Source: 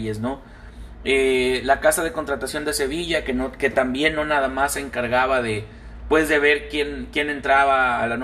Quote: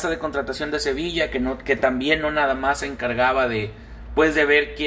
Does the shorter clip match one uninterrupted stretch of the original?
yes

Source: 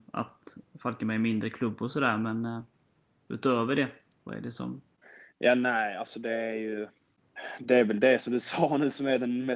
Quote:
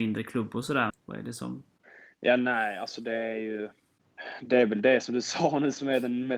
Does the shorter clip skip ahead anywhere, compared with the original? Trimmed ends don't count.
yes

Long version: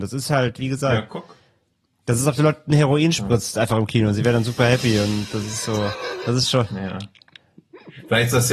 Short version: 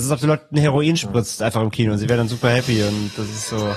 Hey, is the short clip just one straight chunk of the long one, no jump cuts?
yes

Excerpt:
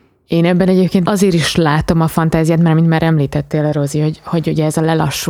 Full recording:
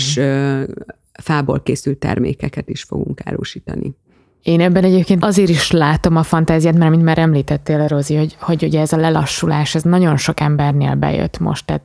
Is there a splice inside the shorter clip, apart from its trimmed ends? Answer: no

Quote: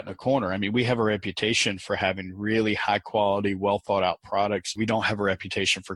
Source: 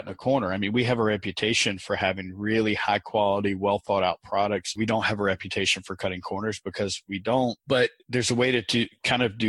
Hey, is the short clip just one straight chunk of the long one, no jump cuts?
yes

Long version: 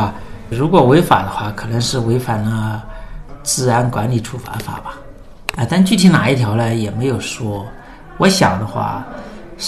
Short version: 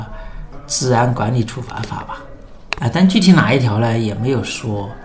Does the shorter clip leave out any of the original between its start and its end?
no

